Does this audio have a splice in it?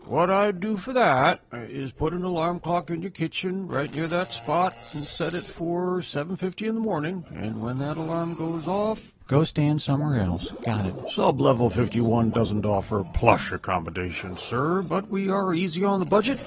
no; 0 cuts

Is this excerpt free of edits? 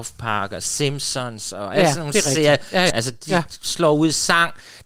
no; 1 cut; at 2.9 s

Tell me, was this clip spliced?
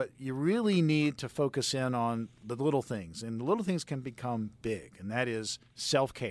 no; 0 cuts

